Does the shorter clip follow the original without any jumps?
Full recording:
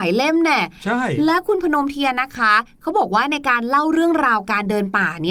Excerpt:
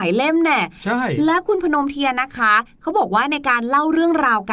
yes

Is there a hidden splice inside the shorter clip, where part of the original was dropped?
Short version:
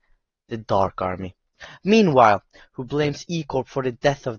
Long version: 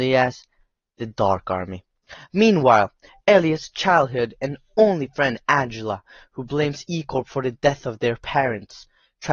yes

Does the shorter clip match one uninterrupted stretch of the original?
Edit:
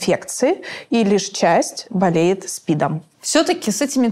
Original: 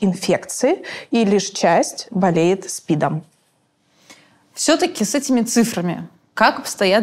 no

